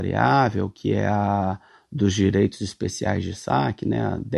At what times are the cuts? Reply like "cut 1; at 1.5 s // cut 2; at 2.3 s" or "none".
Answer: none